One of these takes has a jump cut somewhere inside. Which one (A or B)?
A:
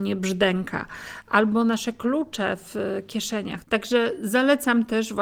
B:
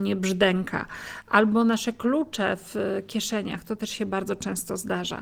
A